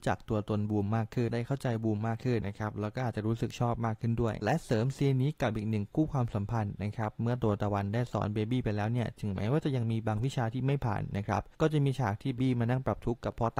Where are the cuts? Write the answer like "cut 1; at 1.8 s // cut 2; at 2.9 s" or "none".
cut 1; at 2.4 s // cut 2; at 12.4 s